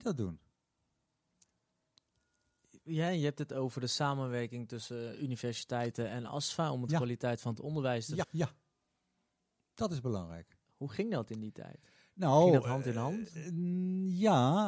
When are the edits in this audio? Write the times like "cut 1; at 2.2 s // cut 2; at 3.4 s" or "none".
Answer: cut 1; at 8.2 s